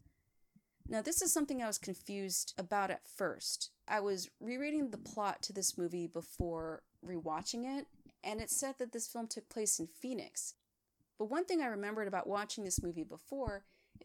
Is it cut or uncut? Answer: uncut